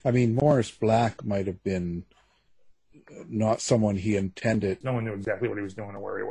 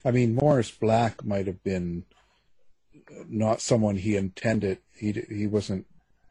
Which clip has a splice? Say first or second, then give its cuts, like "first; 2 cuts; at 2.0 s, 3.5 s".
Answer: first; 1 cut; at 4.8 s